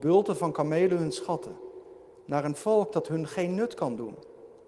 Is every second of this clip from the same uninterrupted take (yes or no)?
yes